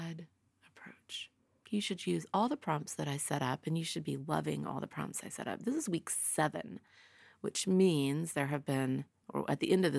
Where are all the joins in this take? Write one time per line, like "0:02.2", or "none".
0:01.6